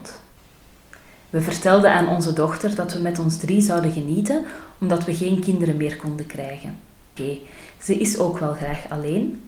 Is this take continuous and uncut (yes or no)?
no